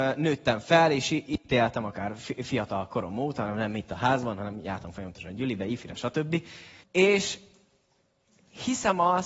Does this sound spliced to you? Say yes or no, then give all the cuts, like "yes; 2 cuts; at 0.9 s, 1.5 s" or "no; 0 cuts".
yes; 1 cut; at 6.8 s